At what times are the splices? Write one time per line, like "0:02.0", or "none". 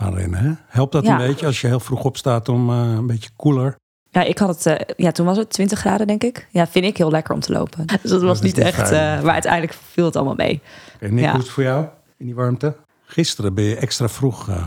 0:07.9
0:12.9

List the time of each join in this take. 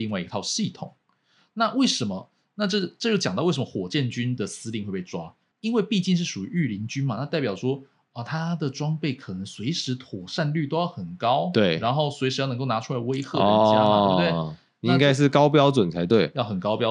none

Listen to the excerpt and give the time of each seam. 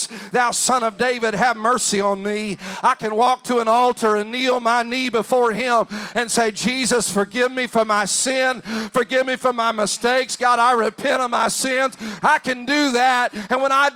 0:12.2

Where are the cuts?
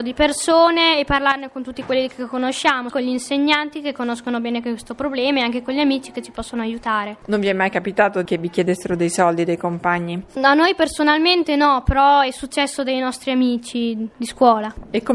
0:02.9

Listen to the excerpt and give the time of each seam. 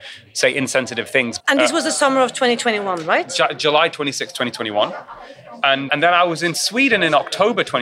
0:01.4
0:05.9

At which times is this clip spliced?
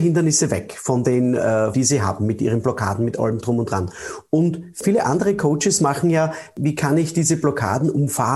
0:01.7
0:03.4

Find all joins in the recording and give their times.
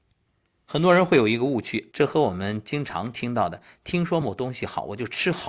0:01.9
0:04.2

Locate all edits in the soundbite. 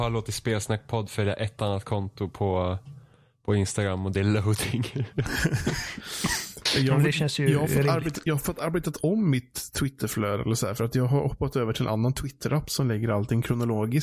none

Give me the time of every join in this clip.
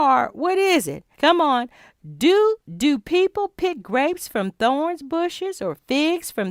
0:01.2
0:02.6

